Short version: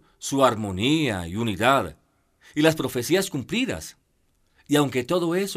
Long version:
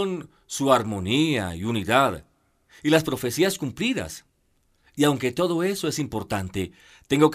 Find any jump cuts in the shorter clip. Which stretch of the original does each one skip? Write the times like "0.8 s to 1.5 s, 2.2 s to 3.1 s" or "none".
none